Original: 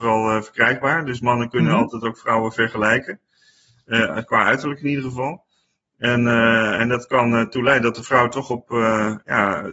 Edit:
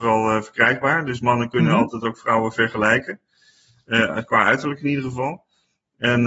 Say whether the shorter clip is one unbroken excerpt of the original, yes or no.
yes